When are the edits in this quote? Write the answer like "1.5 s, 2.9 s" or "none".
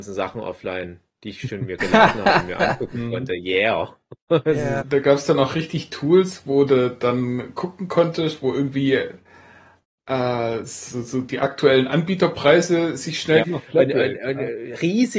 4.8 s, 13.4 s